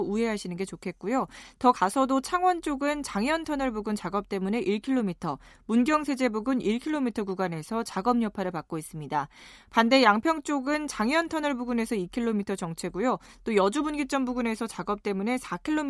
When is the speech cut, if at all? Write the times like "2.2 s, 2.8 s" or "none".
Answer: none